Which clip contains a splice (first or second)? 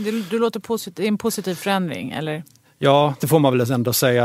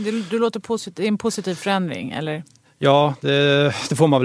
first